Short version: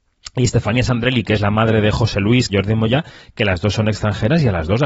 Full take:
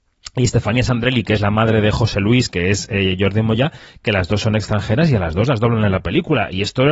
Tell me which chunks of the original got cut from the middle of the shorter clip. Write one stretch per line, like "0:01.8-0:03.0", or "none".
0:02.5-0:03.2